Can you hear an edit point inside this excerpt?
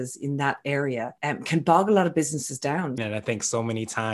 yes; 2 cuts; at 1.2 s, 3.0 s

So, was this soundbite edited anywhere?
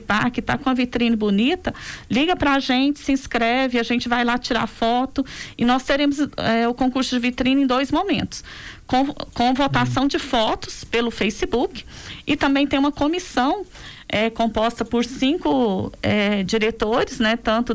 no; 0 cuts

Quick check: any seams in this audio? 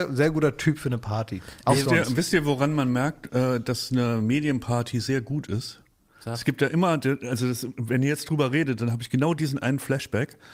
no; 0 cuts

